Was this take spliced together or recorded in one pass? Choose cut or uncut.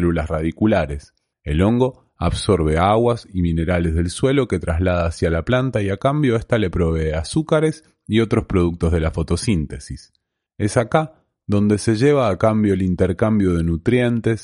cut